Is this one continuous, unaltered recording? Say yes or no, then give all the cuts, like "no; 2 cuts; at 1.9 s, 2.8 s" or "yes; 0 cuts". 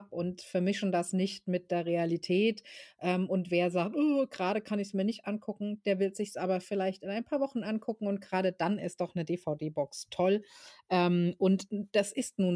yes; 0 cuts